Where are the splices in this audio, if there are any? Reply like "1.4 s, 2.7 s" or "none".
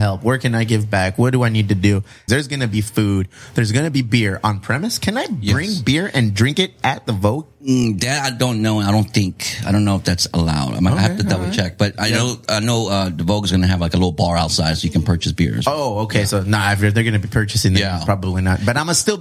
2.3 s